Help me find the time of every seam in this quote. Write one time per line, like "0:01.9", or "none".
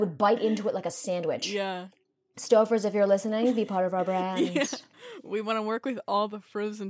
none